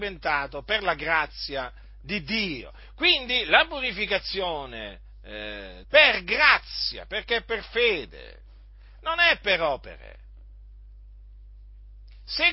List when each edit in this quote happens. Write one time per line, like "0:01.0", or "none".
0:05.8